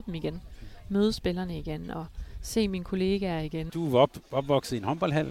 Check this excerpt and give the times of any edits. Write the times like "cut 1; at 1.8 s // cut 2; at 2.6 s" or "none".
cut 1; at 3.7 s

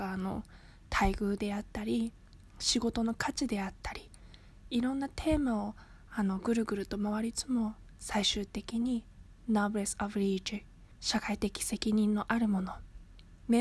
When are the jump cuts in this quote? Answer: cut 1; at 7.3 s

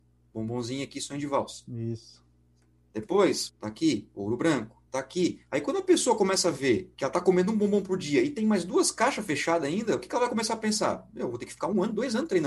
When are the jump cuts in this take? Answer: cut 1; at 3.5 s // cut 2; at 4.9 s // cut 3; at 6.9 s

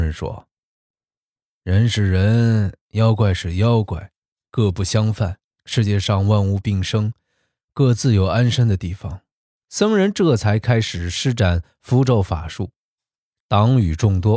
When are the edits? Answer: cut 1; at 5.6 s // cut 2; at 9.6 s // cut 3; at 13.4 s

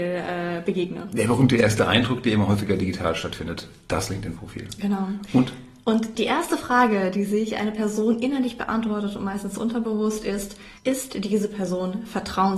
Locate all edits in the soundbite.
cut 1; at 10.8 s

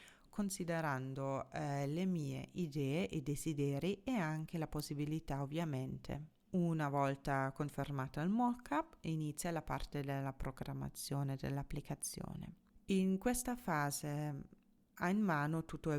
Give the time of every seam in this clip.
cut 1; at 6.5 s

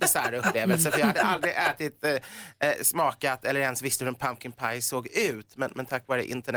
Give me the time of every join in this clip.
none

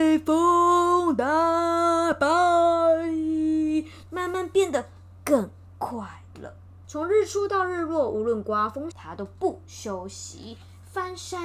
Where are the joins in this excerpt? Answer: cut 1; at 4.1 s // cut 2; at 6.8 s // cut 3; at 8.9 s

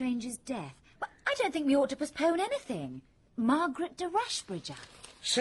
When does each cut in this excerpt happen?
cut 1; at 1.0 s // cut 2; at 3.3 s

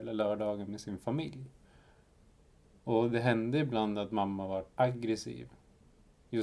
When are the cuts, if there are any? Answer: cut 1; at 2.7 s // cut 2; at 4.7 s

